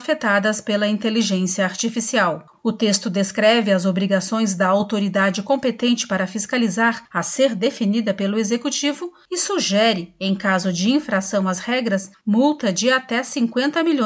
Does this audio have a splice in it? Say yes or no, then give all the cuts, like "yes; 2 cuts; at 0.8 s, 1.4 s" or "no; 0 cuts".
no; 0 cuts